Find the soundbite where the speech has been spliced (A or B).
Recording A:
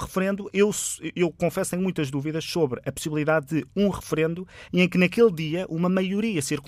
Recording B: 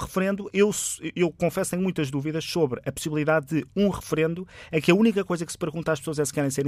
A